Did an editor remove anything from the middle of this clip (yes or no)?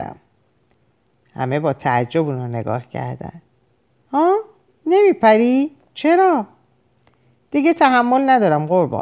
yes